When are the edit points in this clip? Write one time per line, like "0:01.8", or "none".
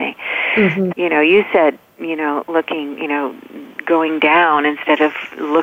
0:00.9